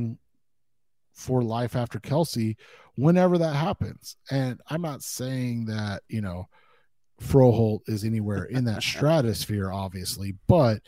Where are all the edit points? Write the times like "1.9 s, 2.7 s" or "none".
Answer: none